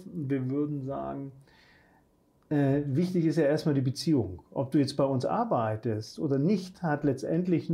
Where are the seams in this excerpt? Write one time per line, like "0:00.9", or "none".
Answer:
none